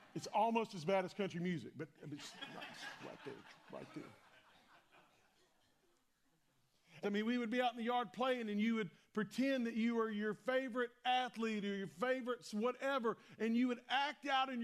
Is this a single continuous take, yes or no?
no